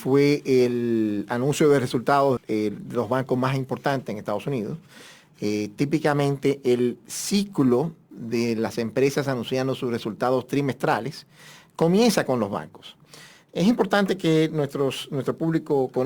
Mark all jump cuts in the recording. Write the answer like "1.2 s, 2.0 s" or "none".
2.4 s